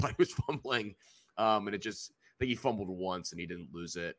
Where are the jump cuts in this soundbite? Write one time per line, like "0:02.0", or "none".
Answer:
none